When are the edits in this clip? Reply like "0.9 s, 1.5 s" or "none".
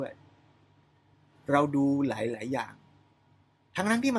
none